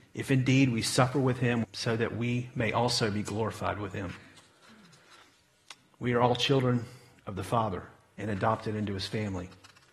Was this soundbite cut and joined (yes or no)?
yes